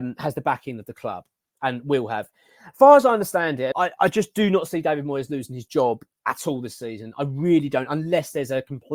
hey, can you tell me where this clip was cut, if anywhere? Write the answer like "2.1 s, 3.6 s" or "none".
3.7 s